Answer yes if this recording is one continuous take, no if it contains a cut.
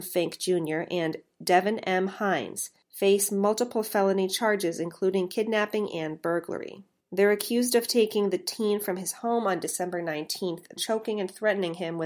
no